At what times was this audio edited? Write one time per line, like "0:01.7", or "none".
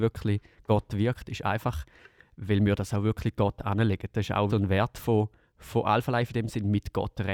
0:04.5

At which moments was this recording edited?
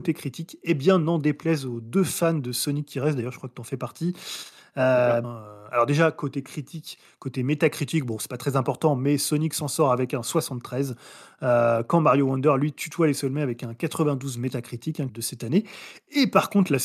0:05.2
0:15.1

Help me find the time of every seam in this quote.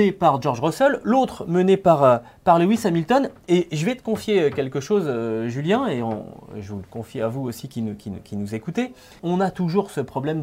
0:09.2

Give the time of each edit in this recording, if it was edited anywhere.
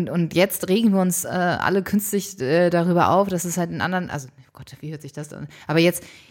none

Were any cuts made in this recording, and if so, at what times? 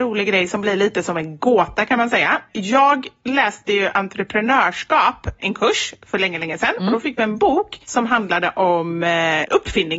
none

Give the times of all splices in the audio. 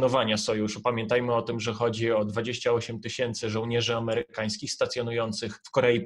none

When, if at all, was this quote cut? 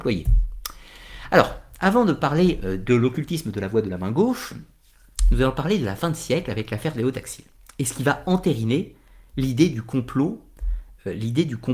none

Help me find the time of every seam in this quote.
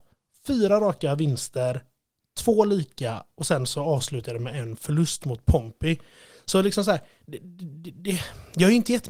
none

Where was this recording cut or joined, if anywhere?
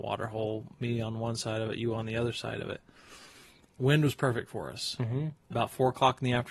0:05.5

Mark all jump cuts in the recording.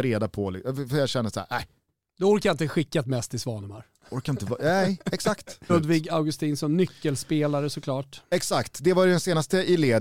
0:05.7

